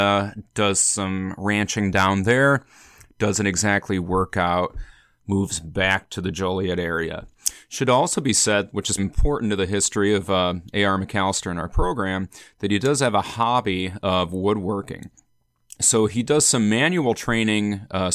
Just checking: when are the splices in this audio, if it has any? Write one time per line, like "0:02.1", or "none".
0:09.0